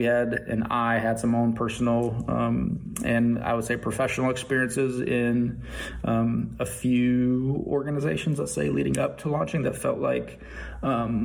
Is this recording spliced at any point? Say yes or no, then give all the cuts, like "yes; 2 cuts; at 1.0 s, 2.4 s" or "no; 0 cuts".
no; 0 cuts